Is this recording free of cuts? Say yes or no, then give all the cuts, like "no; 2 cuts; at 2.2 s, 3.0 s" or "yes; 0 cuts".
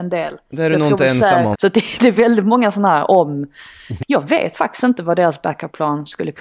no; 2 cuts; at 1.5 s, 4.0 s